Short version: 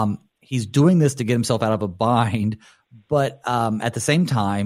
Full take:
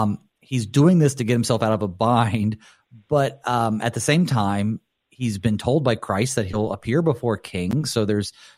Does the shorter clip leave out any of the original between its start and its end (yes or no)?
no